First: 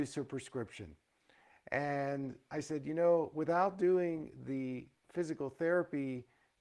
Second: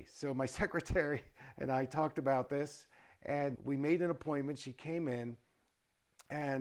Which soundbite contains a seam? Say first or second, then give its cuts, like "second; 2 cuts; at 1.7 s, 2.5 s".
second; 1 cut; at 3.6 s